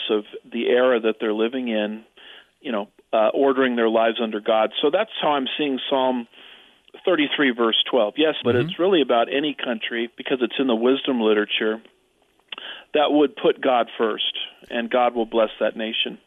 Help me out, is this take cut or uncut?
cut